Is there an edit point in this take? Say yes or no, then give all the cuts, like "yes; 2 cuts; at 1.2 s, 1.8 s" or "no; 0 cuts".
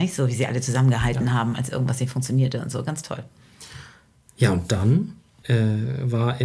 no; 0 cuts